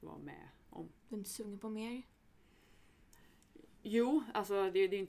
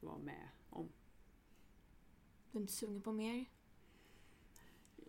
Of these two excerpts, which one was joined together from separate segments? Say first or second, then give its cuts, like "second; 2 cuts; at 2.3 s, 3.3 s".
first; 1 cut; at 1.0 s